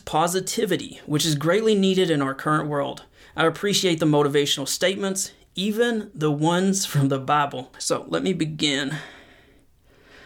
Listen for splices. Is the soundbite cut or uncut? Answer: cut